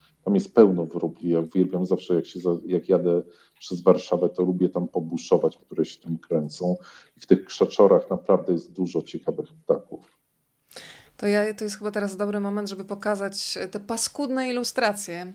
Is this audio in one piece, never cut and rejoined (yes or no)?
no